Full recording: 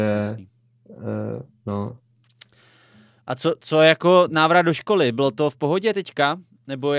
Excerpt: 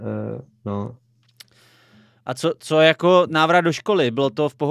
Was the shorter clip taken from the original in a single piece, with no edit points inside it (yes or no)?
yes